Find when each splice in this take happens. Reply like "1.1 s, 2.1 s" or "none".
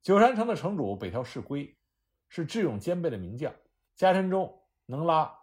3.9 s